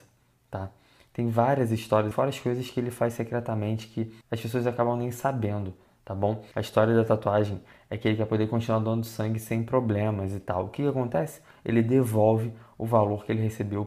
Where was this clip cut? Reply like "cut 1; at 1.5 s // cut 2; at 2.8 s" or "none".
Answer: cut 1; at 2.1 s // cut 2; at 4.2 s // cut 3; at 6.5 s

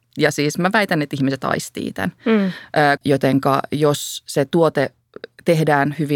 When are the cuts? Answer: cut 1; at 3.0 s

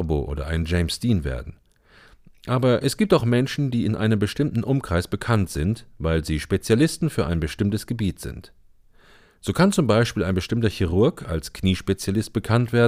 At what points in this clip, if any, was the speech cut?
none

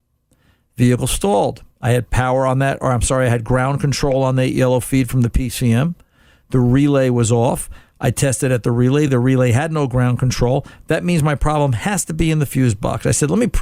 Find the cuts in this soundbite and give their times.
none

